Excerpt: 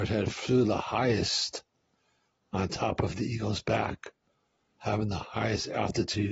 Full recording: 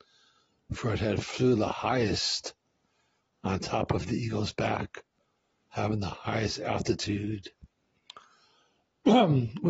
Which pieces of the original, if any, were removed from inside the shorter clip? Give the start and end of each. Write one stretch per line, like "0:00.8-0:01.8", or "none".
none